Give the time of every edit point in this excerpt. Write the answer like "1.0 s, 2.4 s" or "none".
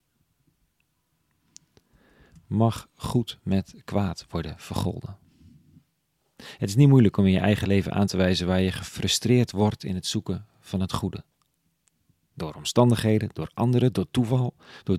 none